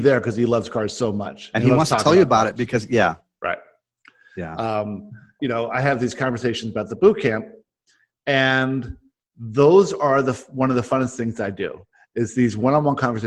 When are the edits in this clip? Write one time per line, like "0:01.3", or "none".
0:05.4